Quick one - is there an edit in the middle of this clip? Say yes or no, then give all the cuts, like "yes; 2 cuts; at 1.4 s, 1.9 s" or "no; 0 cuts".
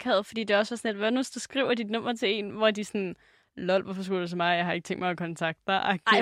no; 0 cuts